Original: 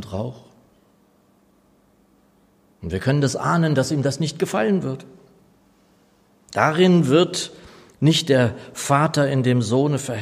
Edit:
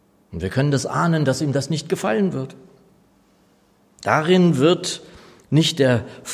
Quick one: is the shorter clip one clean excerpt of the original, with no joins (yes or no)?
yes